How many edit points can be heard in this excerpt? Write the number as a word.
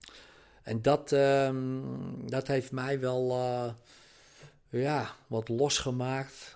zero